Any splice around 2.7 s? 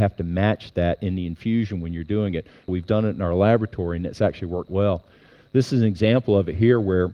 yes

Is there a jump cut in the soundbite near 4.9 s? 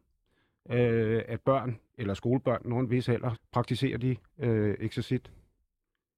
no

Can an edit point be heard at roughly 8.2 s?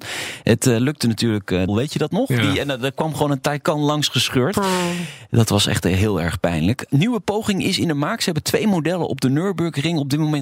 no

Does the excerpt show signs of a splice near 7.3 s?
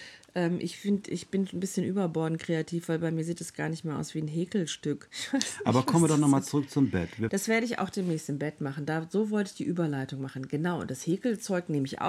yes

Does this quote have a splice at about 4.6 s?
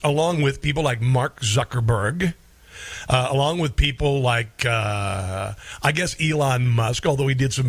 no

